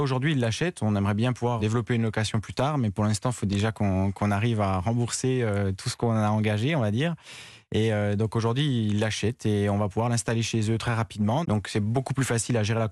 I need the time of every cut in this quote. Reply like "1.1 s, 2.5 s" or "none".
1.6 s, 11.4 s